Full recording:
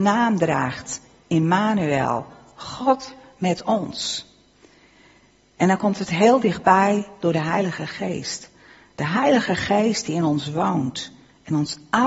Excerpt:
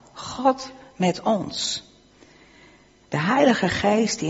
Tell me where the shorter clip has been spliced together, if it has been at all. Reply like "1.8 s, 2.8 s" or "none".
3.0 s